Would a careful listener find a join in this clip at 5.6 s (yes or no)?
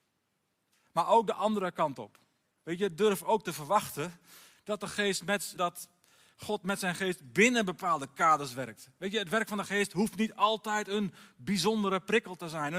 yes